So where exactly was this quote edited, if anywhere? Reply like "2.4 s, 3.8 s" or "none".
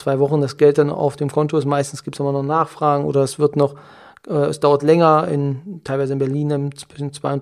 none